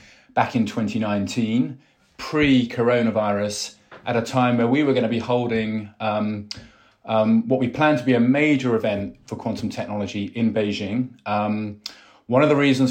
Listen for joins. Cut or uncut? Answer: uncut